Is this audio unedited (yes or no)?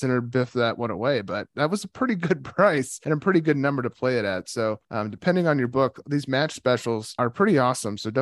yes